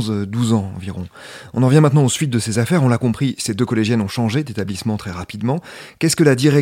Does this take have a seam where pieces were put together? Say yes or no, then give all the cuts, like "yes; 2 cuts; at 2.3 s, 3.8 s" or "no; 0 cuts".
no; 0 cuts